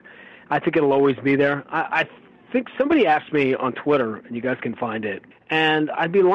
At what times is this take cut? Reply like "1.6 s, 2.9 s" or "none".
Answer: 5.3 s